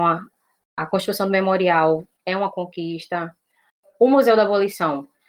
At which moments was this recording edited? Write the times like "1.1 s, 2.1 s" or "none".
2.2 s

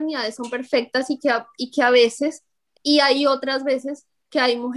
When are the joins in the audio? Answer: 2.7 s

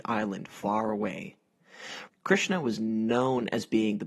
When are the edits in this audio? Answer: 2.1 s

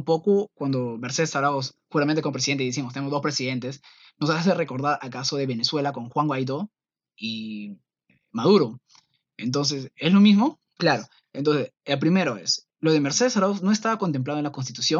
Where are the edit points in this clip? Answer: 10.8 s, 12.7 s

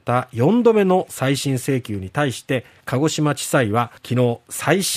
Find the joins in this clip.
4.0 s

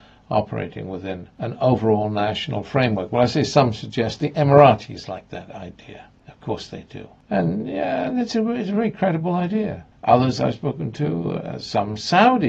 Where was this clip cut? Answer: none

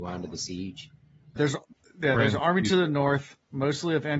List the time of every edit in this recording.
1.4 s

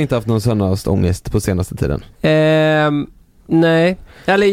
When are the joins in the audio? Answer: 2.1 s

